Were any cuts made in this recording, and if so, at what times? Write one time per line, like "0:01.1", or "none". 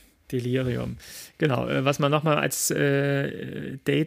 none